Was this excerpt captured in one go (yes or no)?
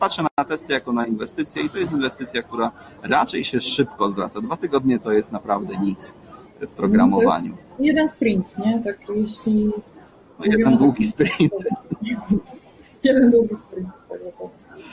yes